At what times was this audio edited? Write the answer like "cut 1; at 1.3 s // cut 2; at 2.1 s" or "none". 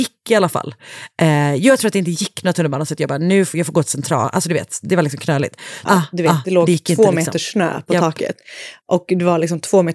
cut 1; at 5.9 s